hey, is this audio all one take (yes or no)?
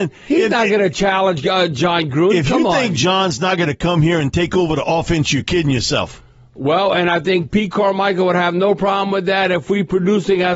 yes